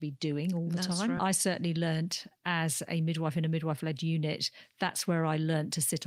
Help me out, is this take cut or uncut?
uncut